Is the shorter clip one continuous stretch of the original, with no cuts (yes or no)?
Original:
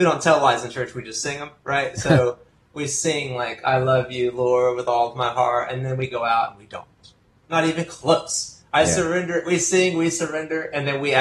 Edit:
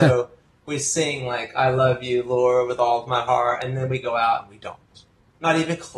yes